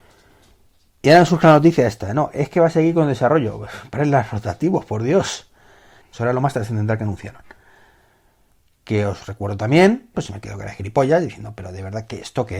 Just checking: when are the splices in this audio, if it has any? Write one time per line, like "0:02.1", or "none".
0:06.0
0:10.1